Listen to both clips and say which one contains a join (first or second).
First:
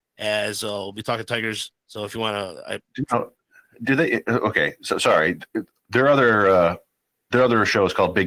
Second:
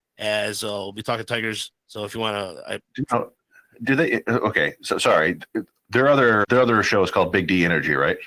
second